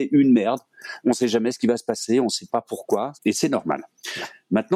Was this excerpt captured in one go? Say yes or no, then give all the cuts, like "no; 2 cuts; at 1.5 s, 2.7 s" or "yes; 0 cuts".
no; 1 cut; at 3.2 s